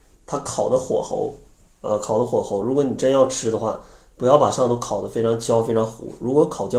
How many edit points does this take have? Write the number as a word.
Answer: zero